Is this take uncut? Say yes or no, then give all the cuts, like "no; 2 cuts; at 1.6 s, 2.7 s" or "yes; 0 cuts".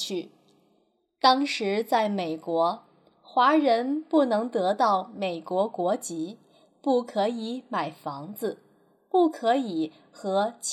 yes; 0 cuts